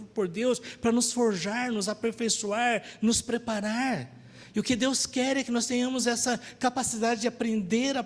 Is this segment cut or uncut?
uncut